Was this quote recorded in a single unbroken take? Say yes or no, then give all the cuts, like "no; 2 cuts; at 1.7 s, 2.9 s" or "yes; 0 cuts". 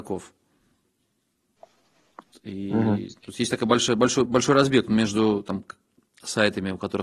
no; 2 cuts; at 2.3 s, 4.3 s